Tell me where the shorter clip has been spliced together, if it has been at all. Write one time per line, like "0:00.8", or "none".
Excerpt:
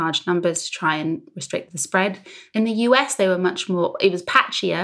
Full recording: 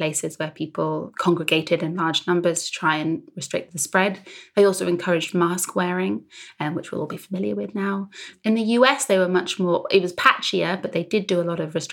0:02.5